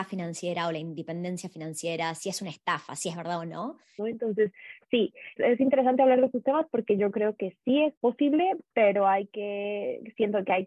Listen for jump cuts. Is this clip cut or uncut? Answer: cut